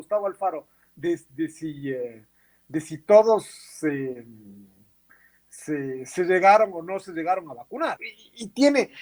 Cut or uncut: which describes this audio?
cut